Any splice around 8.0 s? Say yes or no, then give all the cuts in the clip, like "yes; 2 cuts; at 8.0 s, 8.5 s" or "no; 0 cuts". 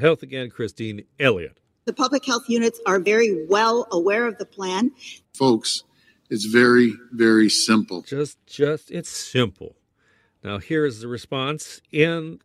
no; 2 cuts; at 1.9 s, 5.2 s